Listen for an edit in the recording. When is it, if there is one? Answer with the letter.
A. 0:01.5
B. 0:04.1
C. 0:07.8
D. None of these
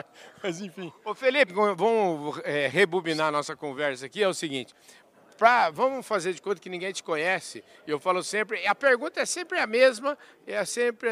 A